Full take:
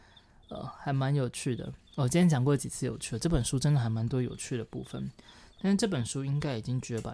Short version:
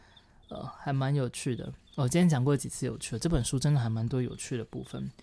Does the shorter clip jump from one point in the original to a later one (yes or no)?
no